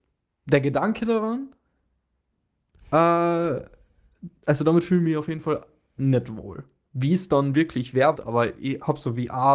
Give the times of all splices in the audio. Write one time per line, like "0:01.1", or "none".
0:04.4
0:08.1